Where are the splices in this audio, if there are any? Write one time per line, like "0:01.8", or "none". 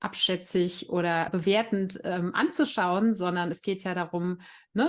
0:01.3